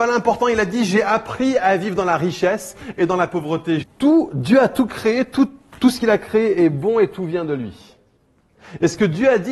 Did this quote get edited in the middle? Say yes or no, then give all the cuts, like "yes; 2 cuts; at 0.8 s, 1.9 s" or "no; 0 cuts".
yes; 1 cut; at 3.8 s